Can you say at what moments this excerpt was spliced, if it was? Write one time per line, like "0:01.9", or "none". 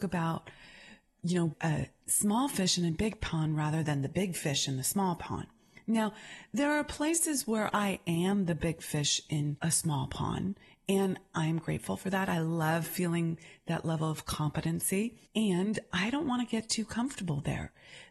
0:01.5